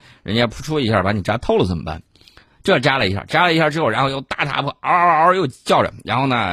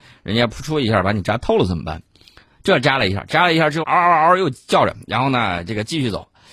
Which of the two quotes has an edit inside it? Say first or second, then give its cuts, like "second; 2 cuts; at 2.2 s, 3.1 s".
second; 1 cut; at 3.8 s